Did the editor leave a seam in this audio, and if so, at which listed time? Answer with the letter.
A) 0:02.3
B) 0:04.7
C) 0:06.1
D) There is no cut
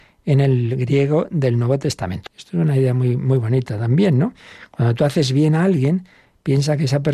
A